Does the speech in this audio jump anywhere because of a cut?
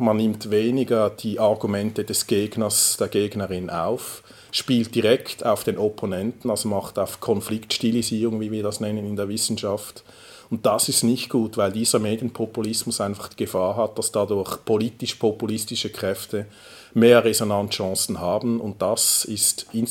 no; 0 cuts

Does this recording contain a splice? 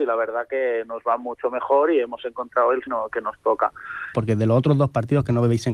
yes; 2 cuts; at 2.9 s, 4.1 s

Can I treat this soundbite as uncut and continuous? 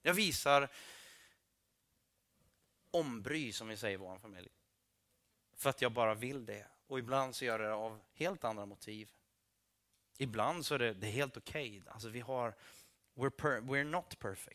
yes; 0 cuts

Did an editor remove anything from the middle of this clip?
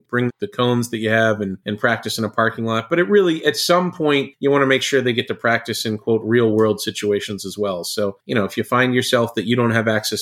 no; 0 cuts

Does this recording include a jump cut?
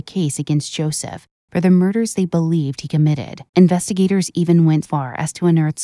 yes; 2 cuts; at 3.5 s, 4.8 s

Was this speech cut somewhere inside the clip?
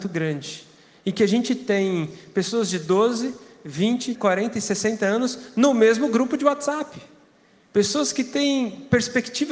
yes; 1 cut; at 4.1 s

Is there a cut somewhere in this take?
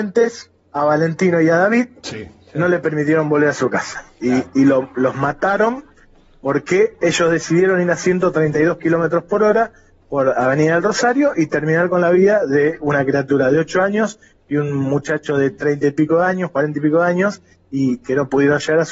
no; 0 cuts

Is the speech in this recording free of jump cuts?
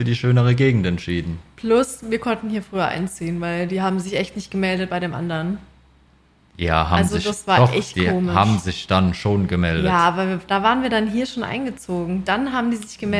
yes; 0 cuts

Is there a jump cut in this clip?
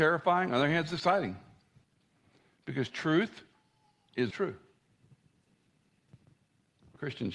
yes; 1 cut; at 4.3 s

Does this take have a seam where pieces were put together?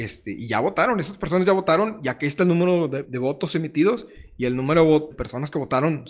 yes; 2 cuts; at 3.0 s, 5.1 s

